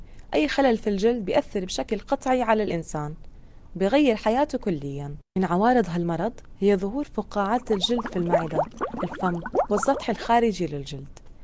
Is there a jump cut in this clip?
yes; 1 cut; at 5.3 s

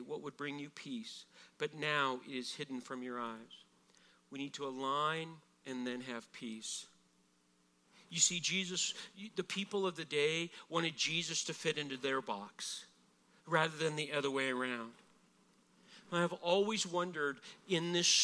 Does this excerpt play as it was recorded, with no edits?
no; 1 cut; at 5.6 s

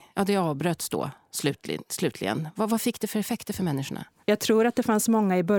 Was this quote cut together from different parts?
no; 0 cuts

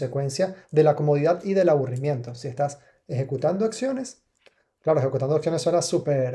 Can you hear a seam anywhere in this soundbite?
no; 0 cuts

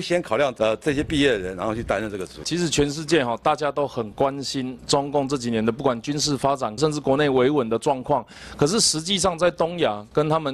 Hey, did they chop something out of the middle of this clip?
yes; 1 cut; at 6.8 s

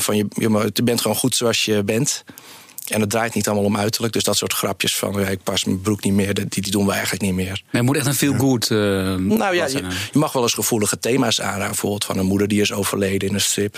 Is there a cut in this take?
no; 0 cuts

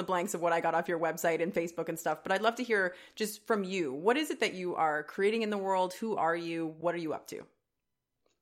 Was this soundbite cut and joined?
no; 0 cuts

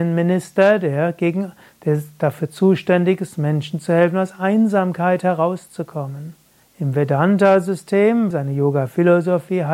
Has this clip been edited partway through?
yes; 2 cuts; at 6.6 s, 8.3 s

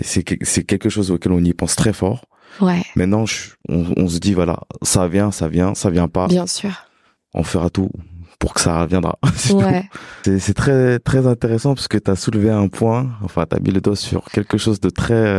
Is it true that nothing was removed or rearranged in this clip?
no; 1 cut; at 10.2 s

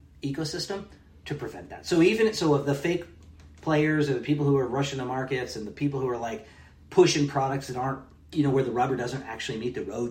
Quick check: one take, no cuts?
yes; 0 cuts

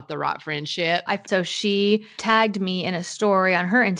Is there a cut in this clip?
yes; 1 cut; at 1.1 s

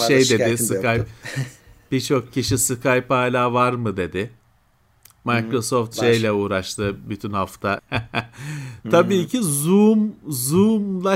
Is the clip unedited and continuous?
no; 1 cut; at 7.8 s

